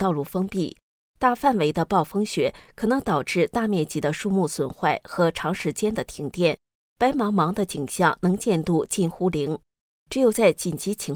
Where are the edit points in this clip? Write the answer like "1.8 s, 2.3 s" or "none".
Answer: none